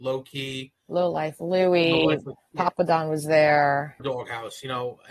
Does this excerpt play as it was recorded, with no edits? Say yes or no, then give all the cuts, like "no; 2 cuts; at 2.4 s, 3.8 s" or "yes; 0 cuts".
no; 2 cuts; at 2.5 s, 4.0 s